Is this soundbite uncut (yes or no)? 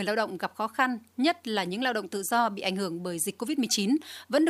yes